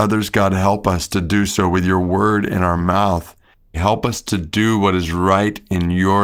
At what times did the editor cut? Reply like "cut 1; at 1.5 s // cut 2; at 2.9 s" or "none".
cut 1; at 3.7 s